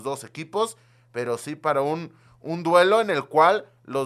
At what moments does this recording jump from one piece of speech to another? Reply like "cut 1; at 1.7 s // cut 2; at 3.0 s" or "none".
none